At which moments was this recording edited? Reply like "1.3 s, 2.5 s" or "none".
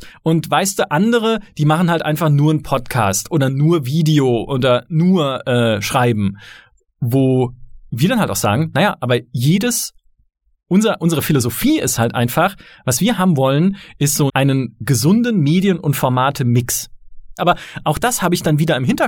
14.3 s, 17.4 s

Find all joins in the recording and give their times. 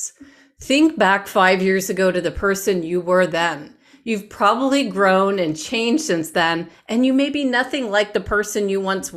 none

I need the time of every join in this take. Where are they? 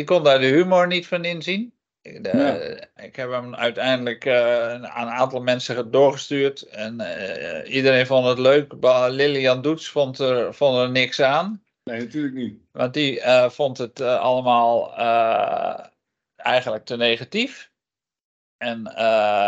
3.0 s

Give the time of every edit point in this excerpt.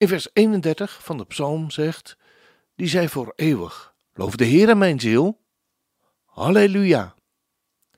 2.7 s, 4.1 s

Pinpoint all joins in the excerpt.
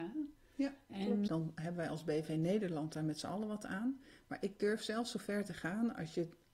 1.3 s

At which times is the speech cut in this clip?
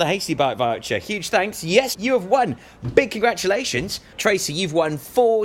1.9 s, 4.1 s

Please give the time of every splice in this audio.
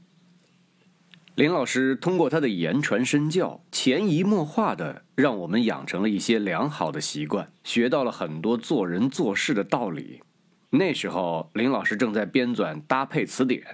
7.6 s, 10.6 s

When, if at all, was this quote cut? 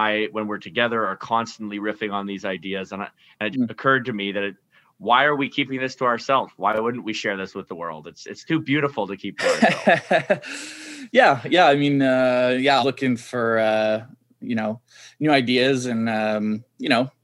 3.5 s, 12.8 s

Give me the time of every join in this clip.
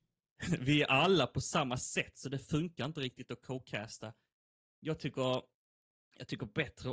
none

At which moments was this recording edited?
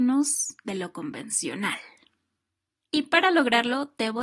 2.8 s

